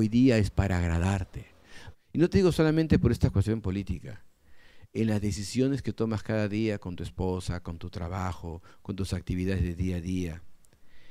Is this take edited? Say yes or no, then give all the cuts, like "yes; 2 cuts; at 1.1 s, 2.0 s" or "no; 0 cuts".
yes; 1 cut; at 1.9 s